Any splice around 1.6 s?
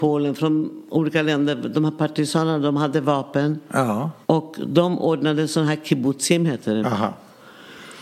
no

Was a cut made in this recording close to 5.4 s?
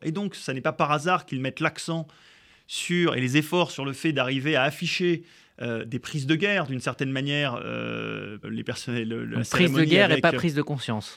no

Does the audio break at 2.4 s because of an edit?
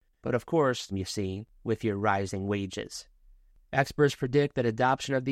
no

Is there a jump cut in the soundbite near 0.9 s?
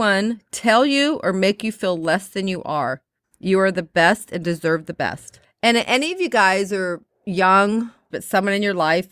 no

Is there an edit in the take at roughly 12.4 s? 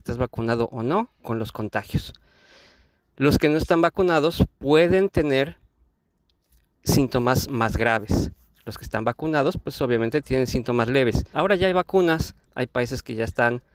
yes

